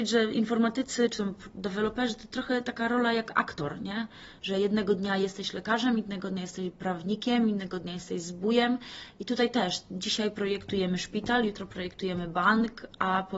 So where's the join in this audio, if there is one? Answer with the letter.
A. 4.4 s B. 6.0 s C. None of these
C